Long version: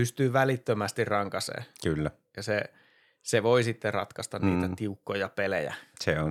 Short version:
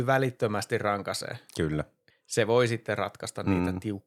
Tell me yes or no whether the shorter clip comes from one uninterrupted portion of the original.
no